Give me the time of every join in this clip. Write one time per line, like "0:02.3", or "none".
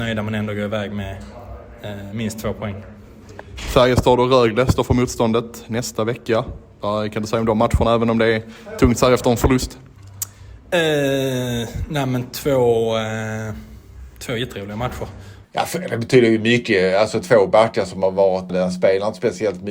0:15.4
0:18.5